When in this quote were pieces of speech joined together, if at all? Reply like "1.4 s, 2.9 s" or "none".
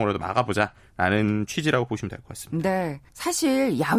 3.1 s